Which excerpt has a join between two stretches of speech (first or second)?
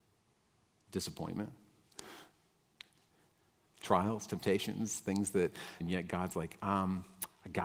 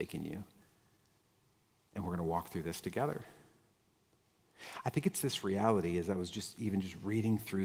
first